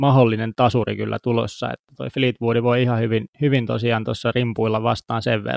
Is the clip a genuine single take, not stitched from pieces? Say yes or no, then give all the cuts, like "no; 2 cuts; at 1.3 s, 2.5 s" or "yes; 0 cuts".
yes; 0 cuts